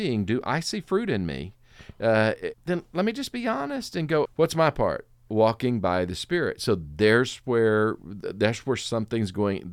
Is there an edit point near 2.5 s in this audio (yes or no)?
yes